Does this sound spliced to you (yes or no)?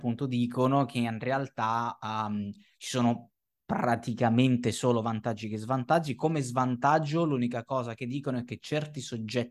no